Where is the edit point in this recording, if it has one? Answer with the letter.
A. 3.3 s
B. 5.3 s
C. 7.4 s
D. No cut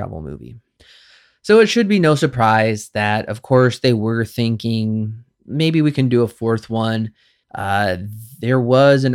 C